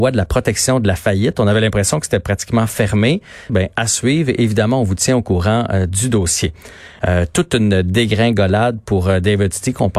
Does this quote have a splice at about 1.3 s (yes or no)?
no